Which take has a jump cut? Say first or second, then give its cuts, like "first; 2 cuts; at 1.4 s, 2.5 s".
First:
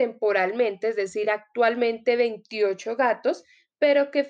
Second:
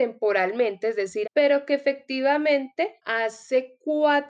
second; 2 cuts; at 1.2 s, 3.0 s